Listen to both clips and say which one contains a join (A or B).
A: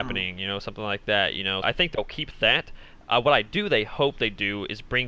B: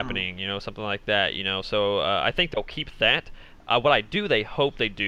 A